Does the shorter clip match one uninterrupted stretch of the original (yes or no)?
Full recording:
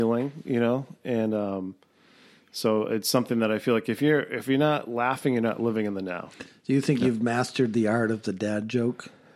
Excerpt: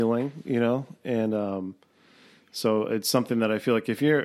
yes